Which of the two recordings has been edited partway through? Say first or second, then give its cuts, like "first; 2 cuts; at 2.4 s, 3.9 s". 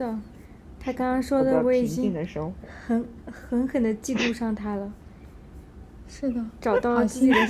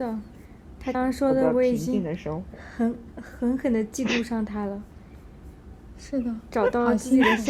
second; 1 cut; at 0.9 s